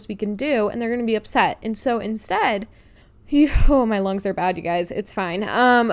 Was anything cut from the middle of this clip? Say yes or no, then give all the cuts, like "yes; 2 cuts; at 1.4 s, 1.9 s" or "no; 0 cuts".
no; 0 cuts